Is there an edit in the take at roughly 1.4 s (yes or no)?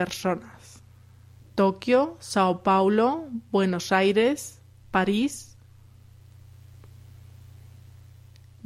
yes